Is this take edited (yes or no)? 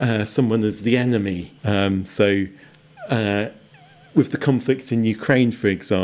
yes